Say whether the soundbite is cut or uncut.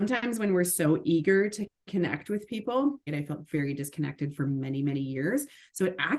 cut